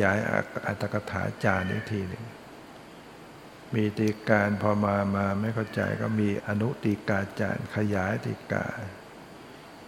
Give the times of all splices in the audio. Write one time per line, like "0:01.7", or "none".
0:06.4